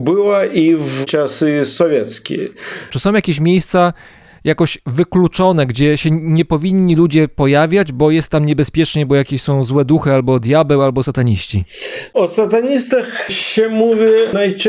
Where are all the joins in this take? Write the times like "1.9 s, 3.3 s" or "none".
2.9 s